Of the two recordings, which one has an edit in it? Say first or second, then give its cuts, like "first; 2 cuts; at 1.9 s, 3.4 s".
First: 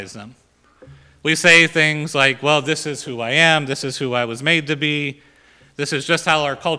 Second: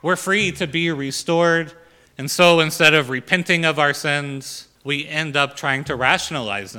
second; 2 cuts; at 2.1 s, 4.8 s